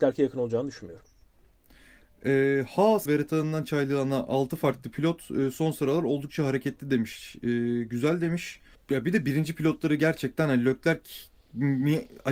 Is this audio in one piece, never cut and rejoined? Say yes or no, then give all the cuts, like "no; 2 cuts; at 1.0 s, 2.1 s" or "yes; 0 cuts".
no; 2 cuts; at 3.1 s, 8.7 s